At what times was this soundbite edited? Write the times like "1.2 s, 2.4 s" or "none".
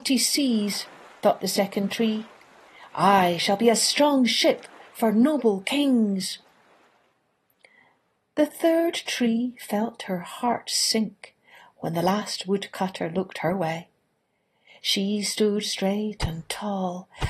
none